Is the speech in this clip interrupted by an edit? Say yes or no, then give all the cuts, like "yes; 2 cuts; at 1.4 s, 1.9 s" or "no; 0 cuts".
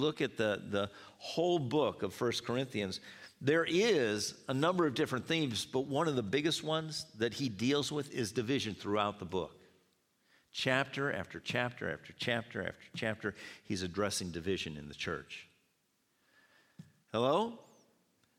yes; 1 cut; at 17.0 s